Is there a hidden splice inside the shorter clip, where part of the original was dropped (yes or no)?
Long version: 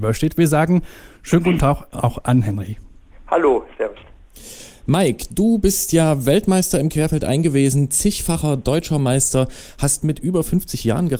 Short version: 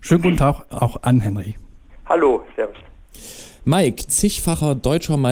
yes